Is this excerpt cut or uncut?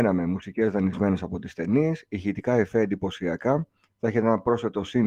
cut